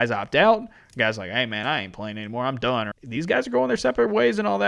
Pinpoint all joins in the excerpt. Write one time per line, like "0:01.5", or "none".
0:02.9